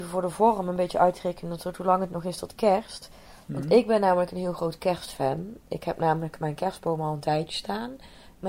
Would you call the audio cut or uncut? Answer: uncut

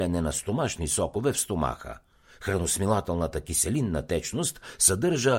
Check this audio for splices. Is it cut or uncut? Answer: uncut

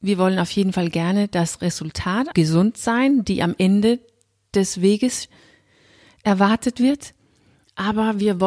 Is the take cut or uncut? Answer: cut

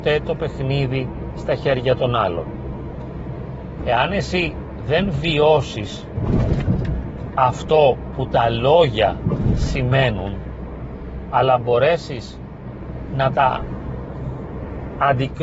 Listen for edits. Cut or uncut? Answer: cut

